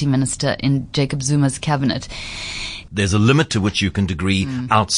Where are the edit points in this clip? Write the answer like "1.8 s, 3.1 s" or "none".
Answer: 2.9 s